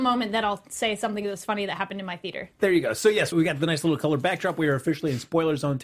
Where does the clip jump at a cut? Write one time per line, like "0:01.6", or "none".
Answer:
0:03.3